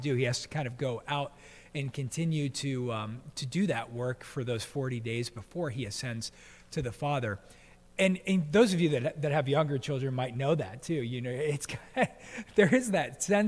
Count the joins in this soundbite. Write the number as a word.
zero